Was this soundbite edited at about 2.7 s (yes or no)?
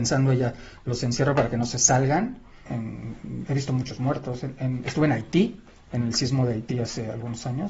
yes